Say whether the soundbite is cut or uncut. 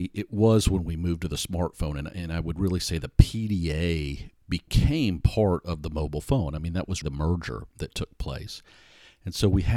cut